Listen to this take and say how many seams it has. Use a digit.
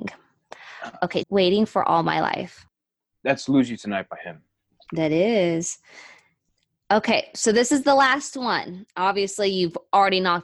1